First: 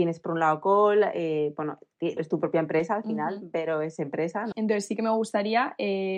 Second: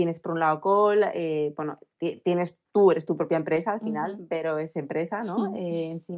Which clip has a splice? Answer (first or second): first